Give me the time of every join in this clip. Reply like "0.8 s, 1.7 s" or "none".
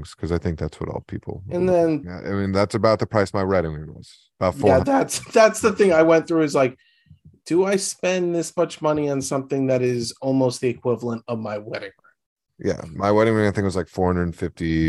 2.0 s